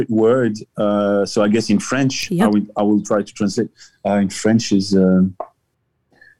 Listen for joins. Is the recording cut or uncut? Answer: uncut